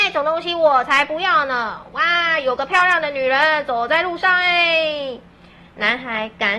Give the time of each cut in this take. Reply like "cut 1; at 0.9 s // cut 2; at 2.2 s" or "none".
cut 1; at 5.6 s